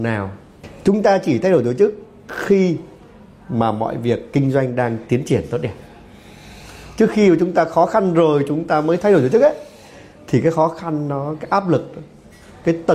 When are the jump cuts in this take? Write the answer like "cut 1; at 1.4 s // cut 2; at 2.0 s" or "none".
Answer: none